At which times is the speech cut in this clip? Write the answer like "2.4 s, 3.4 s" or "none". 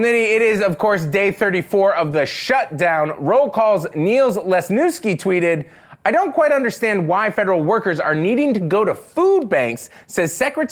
none